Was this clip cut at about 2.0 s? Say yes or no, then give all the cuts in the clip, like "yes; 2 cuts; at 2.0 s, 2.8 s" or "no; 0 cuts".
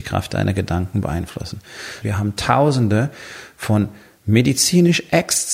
yes; 1 cut; at 2.0 s